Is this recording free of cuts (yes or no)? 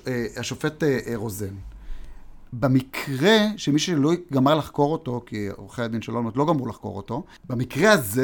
yes